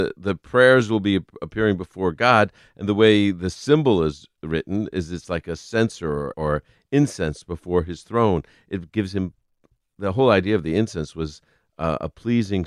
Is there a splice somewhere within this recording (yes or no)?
yes